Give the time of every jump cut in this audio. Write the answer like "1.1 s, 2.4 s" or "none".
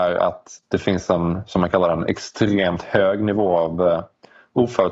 none